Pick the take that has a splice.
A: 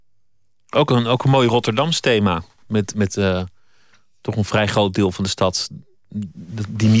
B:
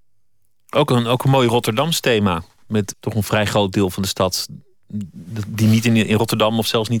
B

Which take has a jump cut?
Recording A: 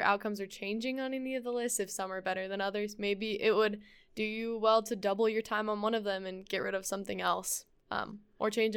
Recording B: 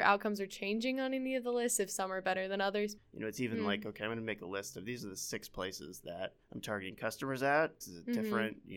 B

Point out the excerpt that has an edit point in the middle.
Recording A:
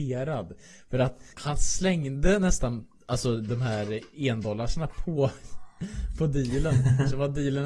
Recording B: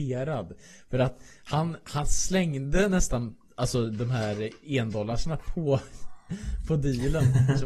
A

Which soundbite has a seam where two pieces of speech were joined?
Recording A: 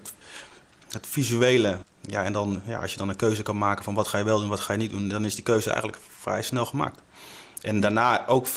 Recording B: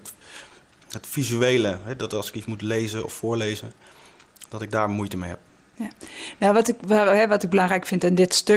A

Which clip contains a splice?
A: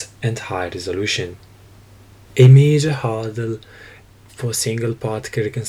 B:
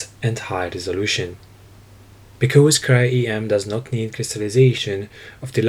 A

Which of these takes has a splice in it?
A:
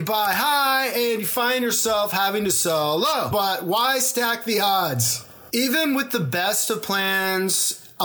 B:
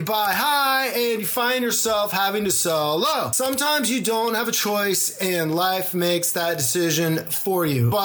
A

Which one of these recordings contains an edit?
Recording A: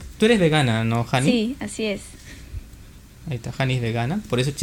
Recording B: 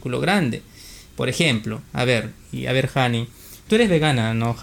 B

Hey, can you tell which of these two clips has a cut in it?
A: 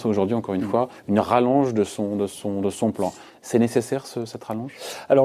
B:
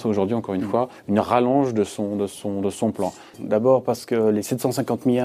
B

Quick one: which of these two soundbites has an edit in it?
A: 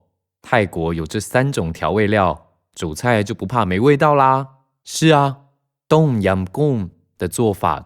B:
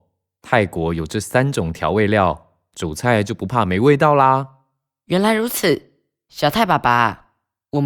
A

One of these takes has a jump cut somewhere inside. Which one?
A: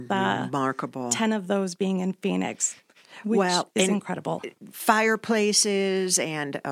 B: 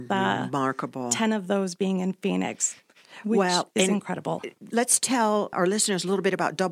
B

